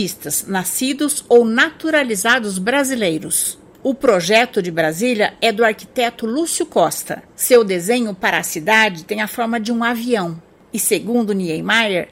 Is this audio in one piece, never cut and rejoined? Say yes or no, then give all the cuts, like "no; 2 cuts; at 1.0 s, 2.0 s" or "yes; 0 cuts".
yes; 0 cuts